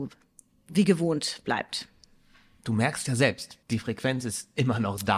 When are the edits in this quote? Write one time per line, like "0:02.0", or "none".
0:03.6